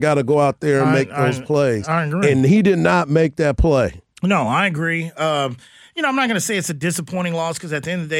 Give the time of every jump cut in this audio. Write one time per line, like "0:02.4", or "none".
none